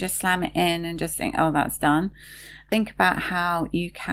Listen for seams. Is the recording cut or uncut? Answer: uncut